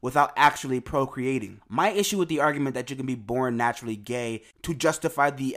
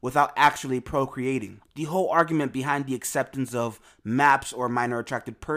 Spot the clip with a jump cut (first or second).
second